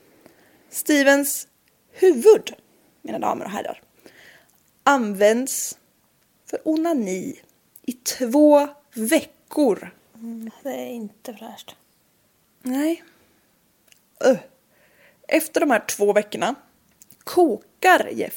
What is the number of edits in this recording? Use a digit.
1